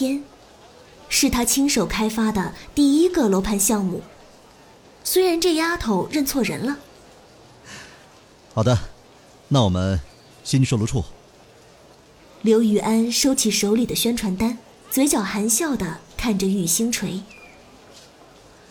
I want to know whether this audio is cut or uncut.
cut